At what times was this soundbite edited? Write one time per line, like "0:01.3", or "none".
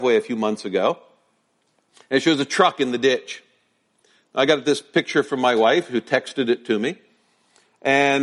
none